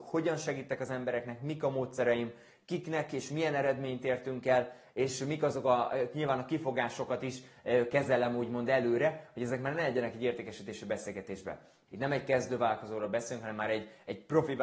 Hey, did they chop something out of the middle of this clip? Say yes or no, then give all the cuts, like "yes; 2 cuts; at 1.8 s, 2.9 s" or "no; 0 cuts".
yes; 1 cut; at 11.9 s